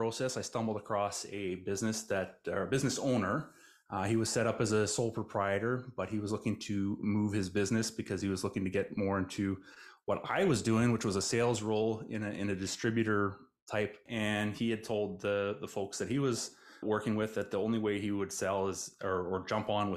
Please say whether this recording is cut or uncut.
cut